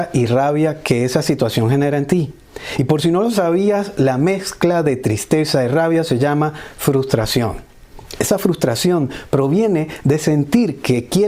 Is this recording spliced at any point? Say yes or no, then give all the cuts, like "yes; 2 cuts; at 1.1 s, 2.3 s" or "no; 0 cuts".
no; 0 cuts